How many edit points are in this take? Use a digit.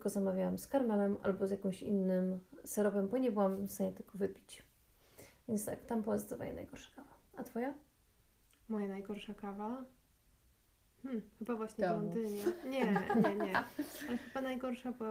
0